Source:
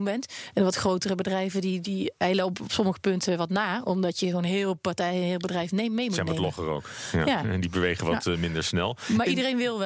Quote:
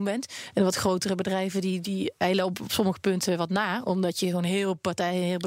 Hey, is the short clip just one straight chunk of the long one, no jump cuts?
yes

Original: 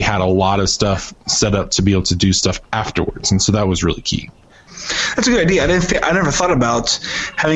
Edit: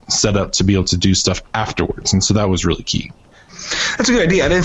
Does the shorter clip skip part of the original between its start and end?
no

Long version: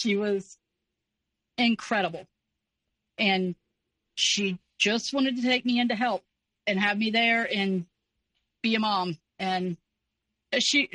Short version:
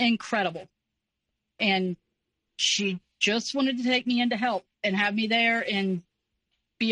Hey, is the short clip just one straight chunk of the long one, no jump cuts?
no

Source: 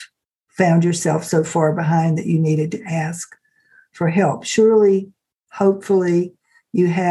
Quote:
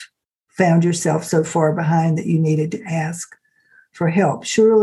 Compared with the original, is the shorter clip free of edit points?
yes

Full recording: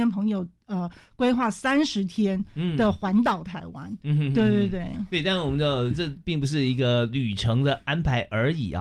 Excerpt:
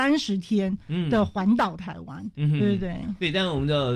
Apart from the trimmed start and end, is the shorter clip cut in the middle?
yes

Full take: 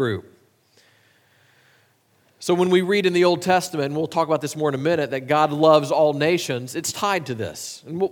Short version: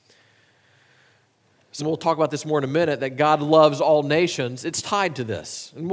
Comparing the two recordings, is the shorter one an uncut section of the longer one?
no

